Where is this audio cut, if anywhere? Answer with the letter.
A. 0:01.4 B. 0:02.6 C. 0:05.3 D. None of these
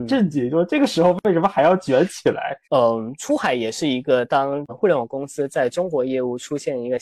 B